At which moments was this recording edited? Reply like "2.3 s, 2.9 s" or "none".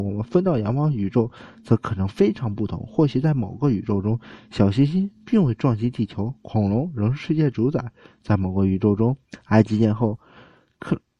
none